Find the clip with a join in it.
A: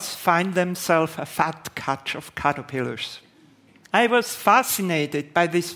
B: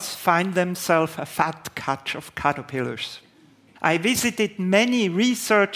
B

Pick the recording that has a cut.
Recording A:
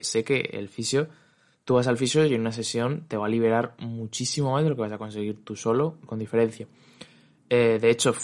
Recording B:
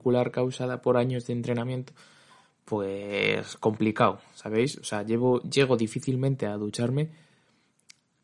A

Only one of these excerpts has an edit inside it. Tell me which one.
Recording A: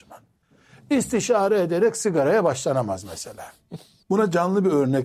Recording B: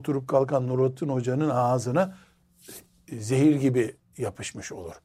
A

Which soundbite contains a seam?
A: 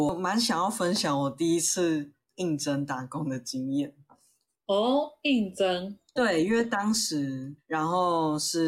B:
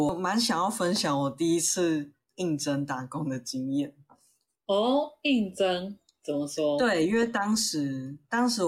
A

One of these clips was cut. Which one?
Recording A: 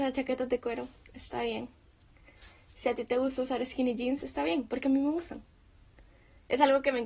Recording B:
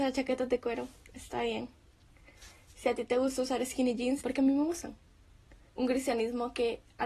B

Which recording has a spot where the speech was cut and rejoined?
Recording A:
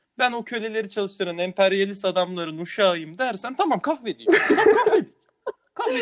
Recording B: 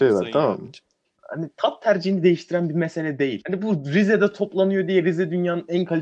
B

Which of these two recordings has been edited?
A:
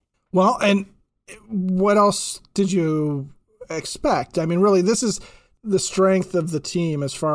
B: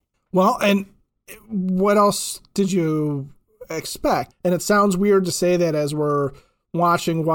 B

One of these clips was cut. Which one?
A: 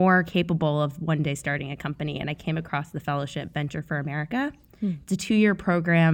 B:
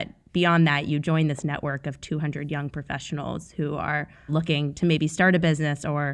B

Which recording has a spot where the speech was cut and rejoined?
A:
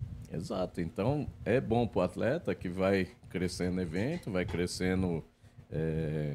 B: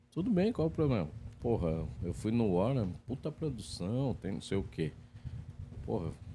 B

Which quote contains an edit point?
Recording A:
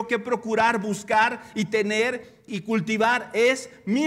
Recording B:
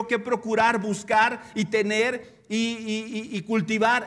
A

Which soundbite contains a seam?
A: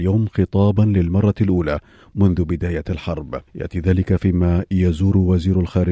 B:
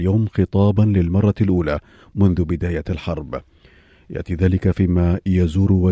A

